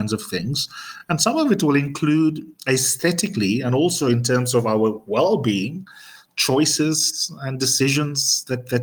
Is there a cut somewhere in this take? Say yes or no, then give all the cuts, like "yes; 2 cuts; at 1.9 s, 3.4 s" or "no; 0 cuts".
no; 0 cuts